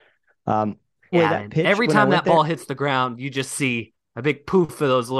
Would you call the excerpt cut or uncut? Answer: cut